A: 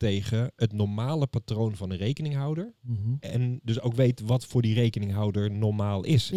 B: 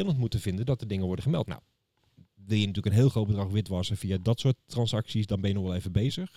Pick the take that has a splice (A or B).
B